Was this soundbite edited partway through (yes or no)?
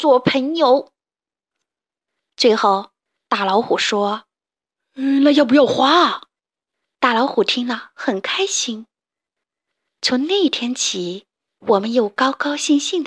yes